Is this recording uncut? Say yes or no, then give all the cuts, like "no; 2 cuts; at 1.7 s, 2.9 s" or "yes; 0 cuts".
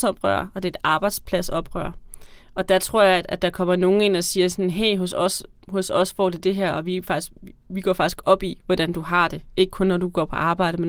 yes; 0 cuts